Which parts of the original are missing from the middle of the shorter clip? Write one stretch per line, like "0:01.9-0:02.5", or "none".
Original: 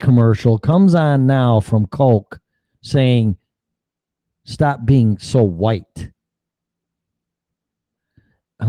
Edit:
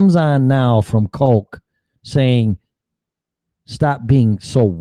none